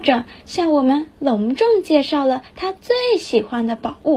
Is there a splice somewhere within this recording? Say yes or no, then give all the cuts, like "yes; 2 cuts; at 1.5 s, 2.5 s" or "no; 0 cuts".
no; 0 cuts